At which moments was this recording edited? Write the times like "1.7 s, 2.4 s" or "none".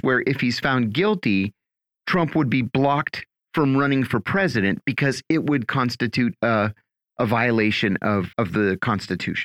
8.3 s